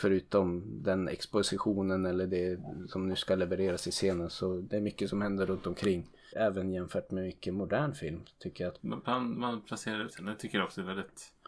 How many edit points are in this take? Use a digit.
3